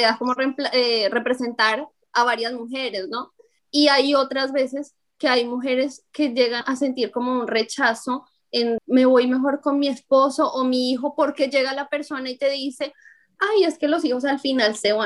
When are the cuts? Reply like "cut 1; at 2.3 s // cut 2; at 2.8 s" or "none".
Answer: cut 1; at 3.6 s // cut 2; at 6.6 s // cut 3; at 8.8 s